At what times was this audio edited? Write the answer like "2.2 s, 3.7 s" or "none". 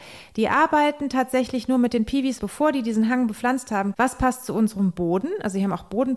2.4 s, 3.9 s